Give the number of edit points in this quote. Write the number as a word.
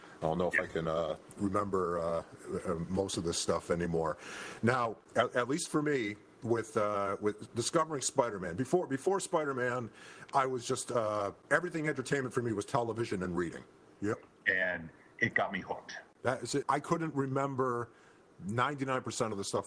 two